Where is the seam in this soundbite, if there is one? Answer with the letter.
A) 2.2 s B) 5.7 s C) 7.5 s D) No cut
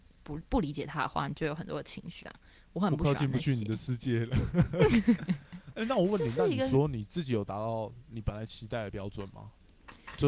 A